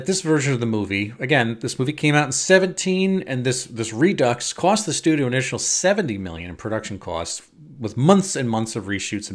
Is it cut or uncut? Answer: uncut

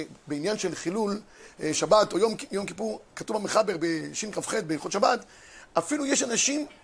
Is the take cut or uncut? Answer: uncut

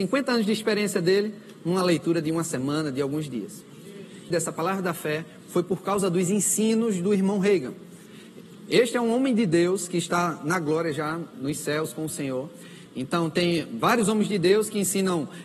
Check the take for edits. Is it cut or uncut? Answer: cut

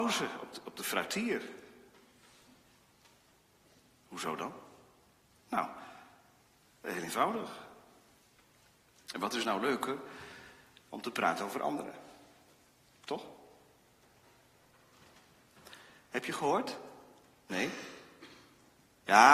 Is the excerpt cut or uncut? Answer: cut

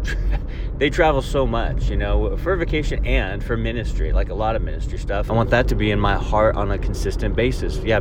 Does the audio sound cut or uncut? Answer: cut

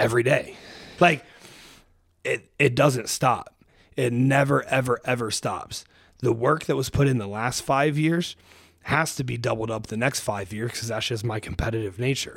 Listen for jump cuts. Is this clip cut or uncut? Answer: cut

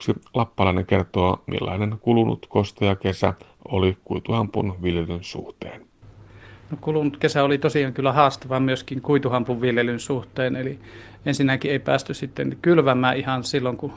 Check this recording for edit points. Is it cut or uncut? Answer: uncut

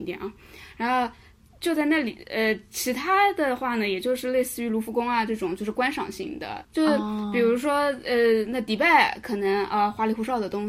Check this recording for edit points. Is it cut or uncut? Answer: cut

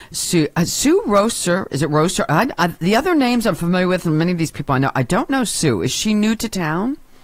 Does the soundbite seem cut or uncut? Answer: uncut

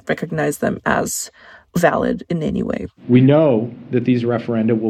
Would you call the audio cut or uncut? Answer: uncut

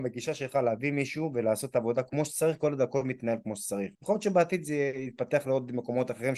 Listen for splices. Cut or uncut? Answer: cut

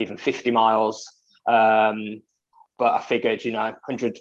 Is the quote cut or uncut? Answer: uncut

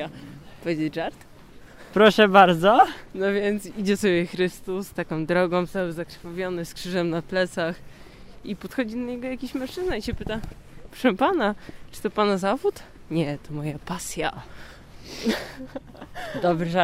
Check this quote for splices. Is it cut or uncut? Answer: uncut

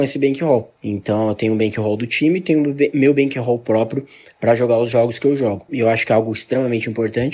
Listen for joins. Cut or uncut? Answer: cut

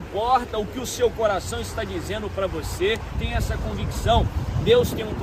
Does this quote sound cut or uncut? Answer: cut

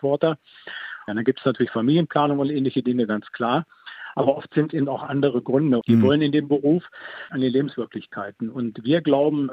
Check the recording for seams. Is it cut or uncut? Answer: cut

